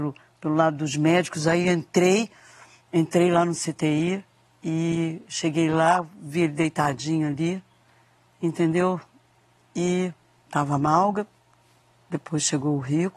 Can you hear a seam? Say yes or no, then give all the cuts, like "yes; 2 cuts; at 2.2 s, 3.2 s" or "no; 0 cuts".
yes; 1 cut; at 10.4 s